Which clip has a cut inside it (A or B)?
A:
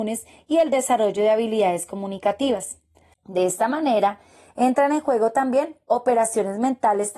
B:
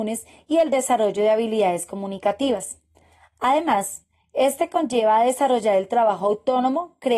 A